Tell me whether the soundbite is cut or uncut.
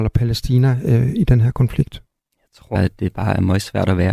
cut